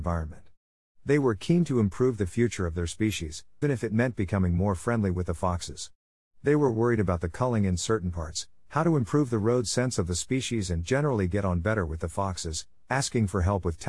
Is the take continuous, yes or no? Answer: no